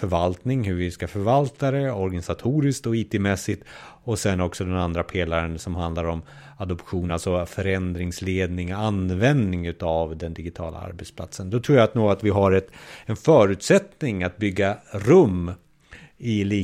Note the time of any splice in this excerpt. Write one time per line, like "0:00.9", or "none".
none